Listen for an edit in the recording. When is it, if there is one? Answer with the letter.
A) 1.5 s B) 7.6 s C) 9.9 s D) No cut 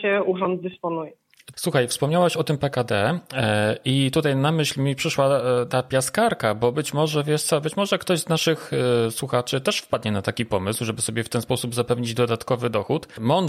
A